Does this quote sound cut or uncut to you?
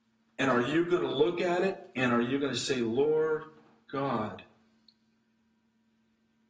uncut